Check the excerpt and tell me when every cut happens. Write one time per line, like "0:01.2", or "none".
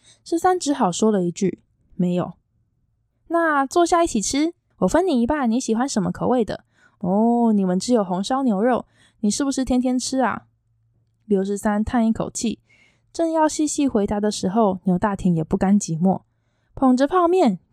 0:04.7